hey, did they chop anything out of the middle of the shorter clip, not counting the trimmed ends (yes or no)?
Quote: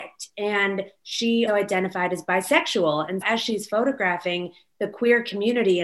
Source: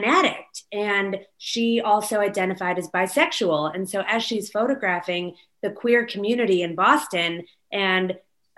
yes